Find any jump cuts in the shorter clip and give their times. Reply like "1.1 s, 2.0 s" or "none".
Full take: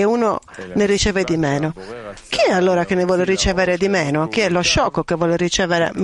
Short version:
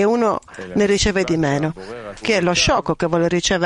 2.2 s